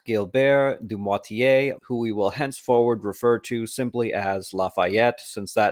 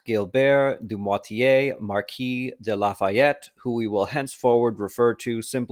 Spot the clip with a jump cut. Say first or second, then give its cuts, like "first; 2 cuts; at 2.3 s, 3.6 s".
first; 1 cut; at 1.8 s